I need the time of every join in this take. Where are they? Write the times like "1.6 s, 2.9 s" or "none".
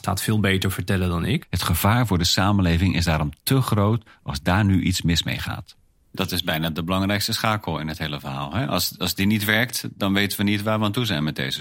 1.4 s